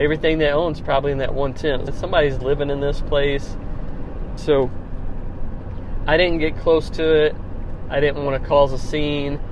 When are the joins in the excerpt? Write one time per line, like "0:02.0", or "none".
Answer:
0:01.9
0:04.4